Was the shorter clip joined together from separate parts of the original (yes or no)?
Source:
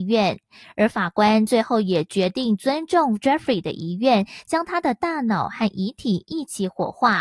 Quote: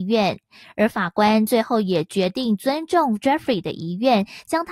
no